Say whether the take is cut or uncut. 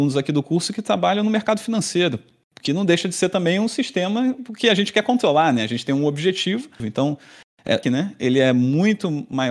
cut